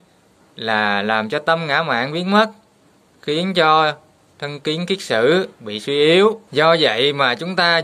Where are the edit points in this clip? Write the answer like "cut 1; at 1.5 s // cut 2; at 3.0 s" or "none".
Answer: cut 1; at 6.5 s